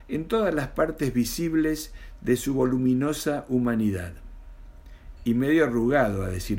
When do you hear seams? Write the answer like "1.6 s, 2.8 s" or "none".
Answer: 5.2 s